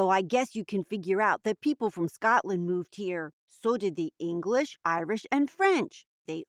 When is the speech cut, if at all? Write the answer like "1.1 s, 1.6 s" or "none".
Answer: none